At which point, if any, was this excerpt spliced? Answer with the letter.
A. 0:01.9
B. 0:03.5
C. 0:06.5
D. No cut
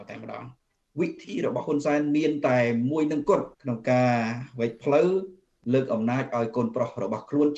B